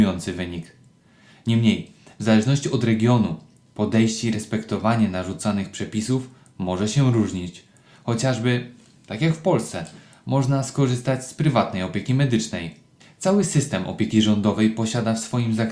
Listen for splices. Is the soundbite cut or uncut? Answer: uncut